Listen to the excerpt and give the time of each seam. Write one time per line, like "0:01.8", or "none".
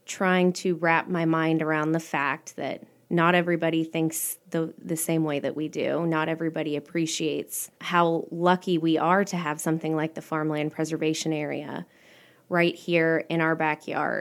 0:07.8